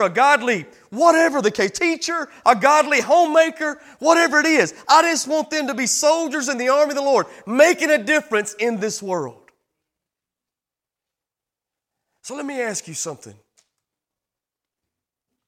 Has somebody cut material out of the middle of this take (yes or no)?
no